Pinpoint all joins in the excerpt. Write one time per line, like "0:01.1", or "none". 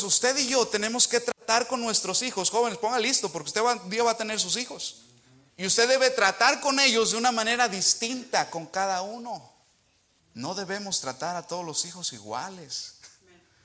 0:05.5
0:10.2